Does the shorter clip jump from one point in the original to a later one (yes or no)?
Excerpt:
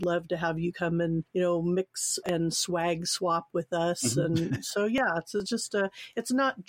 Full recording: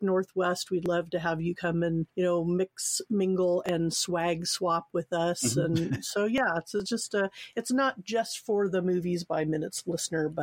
yes